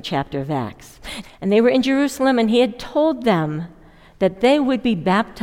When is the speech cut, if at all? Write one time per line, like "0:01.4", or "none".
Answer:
0:01.2